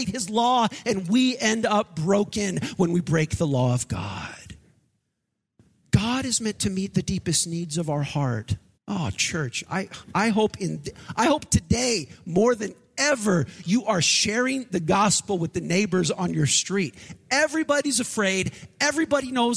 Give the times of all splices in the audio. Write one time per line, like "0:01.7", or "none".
0:08.7